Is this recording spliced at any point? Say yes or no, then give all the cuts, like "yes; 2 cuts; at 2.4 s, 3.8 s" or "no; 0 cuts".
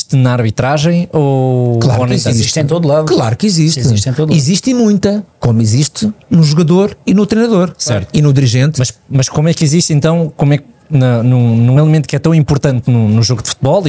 no; 0 cuts